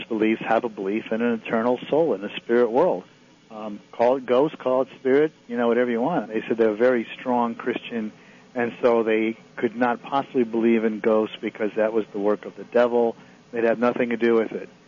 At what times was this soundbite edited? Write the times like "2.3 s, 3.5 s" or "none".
6.2 s